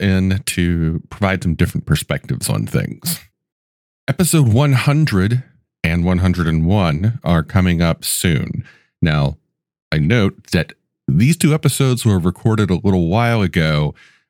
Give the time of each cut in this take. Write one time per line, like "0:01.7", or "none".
none